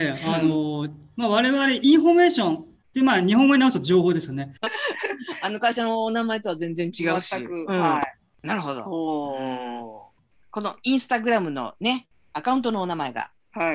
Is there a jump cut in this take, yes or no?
yes